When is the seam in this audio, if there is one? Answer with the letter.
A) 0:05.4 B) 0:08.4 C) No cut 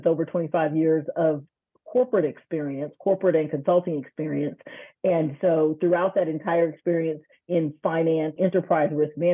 B